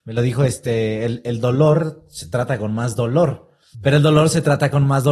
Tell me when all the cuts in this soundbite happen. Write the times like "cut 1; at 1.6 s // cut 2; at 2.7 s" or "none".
cut 1; at 3.7 s